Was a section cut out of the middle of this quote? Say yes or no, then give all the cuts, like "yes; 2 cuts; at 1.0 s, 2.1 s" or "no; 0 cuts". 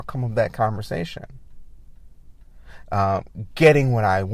yes; 1 cut; at 2.8 s